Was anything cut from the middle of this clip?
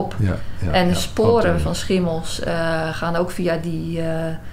no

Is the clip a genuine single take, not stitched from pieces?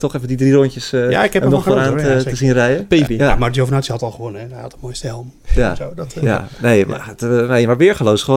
no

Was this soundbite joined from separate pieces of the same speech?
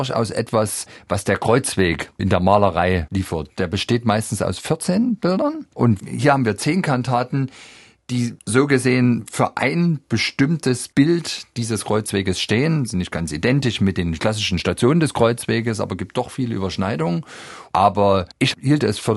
yes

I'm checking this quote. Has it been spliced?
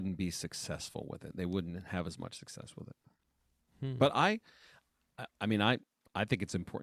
no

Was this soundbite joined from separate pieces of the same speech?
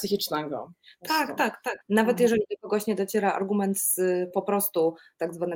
yes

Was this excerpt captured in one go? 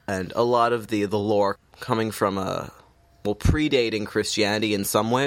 yes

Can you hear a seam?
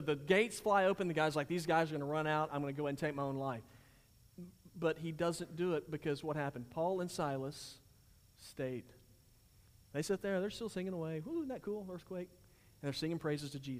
no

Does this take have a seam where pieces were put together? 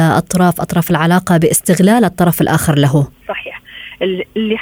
yes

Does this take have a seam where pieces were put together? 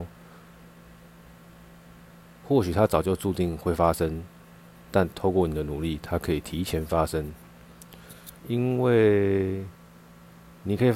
yes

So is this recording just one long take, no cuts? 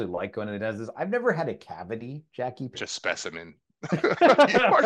no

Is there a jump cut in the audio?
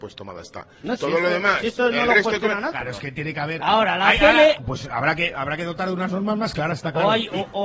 yes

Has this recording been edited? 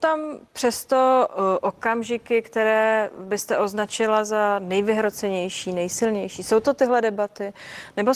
no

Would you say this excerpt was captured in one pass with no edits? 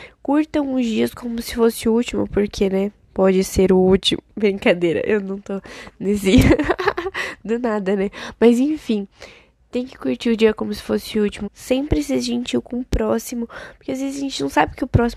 no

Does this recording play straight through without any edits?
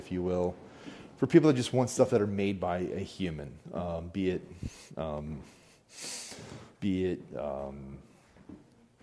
no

